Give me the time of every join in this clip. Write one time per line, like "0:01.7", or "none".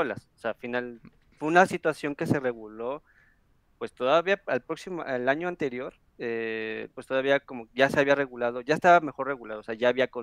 0:06.9